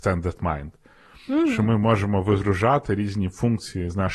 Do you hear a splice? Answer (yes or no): no